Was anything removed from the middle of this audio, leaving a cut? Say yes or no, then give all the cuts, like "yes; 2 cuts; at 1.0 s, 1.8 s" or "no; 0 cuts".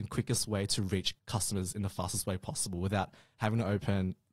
yes; 1 cut; at 1.2 s